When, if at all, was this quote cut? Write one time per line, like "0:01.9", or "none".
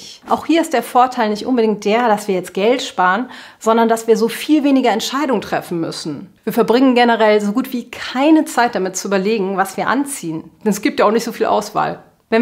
0:06.4